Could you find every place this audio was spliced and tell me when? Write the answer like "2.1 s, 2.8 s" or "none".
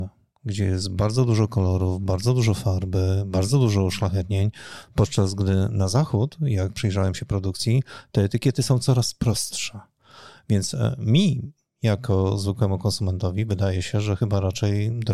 none